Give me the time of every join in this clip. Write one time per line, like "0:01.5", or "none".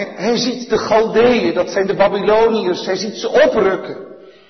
none